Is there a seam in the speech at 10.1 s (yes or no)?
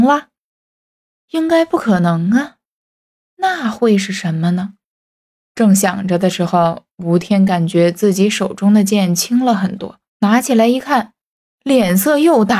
yes